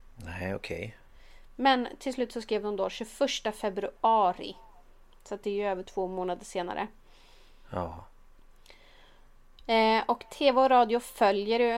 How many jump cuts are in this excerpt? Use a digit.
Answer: 0